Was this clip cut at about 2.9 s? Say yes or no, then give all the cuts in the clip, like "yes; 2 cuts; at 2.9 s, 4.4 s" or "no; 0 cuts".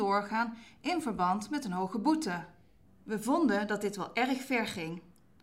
yes; 1 cut; at 2.9 s